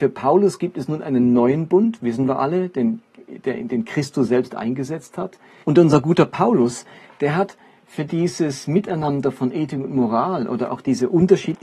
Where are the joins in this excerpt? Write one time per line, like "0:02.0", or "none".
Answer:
0:05.6

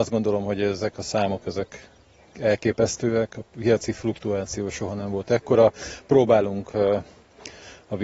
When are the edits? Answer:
none

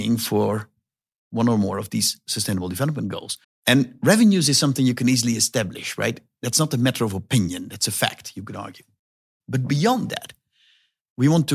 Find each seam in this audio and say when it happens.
0:03.4
0:09.4

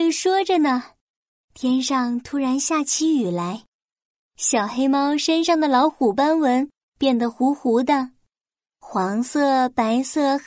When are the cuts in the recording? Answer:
none

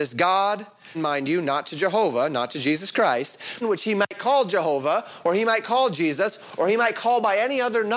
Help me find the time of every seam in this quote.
0:00.9
0:03.6

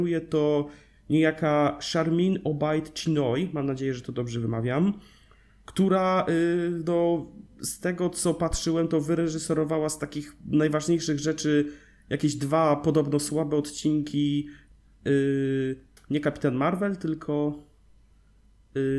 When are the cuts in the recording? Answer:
0:16.0

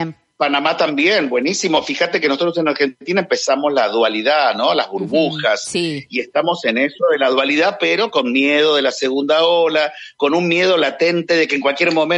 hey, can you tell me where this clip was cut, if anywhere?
none

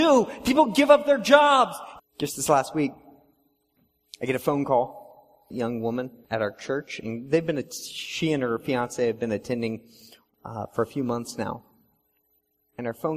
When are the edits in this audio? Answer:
0:02.0

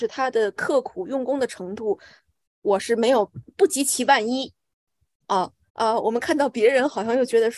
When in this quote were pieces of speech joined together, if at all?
0:05.7

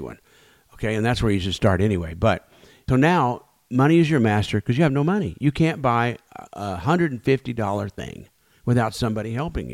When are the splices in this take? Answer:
0:02.9

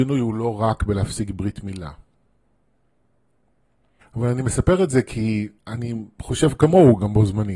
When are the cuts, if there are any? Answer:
0:04.0
0:05.6

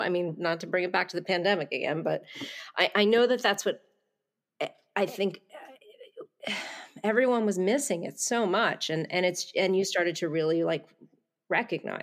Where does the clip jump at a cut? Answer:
none

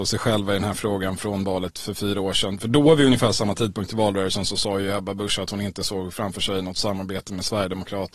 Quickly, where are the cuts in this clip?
none

